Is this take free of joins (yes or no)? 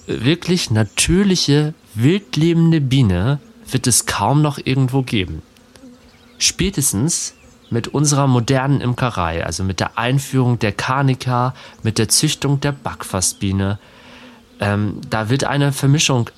yes